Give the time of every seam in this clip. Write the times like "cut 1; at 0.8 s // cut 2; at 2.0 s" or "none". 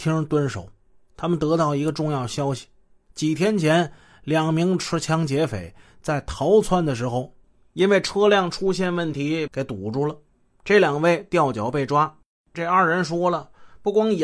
cut 1; at 9.5 s // cut 2; at 12.5 s